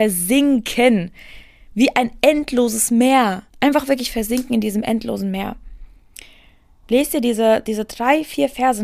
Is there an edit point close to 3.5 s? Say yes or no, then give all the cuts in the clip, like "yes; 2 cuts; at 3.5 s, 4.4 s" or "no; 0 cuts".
yes; 2 cuts; at 3.5 s, 6.8 s